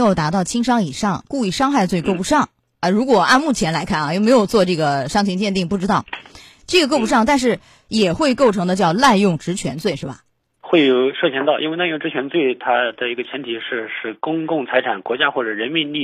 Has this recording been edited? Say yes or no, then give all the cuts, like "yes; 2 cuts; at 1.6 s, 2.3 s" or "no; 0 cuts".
no; 0 cuts